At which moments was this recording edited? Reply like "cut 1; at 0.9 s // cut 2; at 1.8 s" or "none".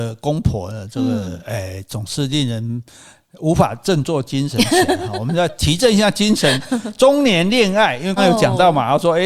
cut 1; at 8.2 s